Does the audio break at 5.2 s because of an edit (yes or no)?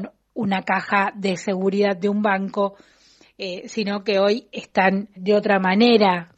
yes